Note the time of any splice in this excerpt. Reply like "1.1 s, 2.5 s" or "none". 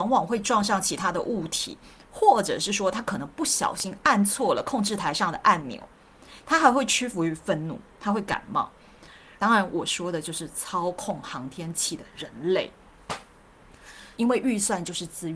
9.4 s, 14.2 s